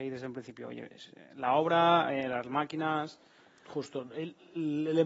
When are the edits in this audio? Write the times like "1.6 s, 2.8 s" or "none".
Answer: none